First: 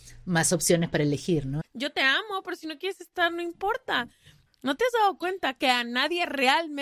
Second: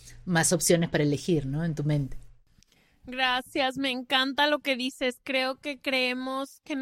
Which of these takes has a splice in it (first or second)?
first